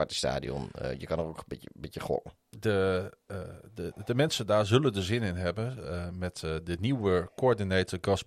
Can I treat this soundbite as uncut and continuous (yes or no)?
yes